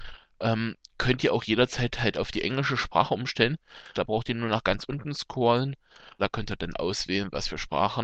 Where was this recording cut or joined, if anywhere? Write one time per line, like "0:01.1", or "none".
0:03.9
0:06.2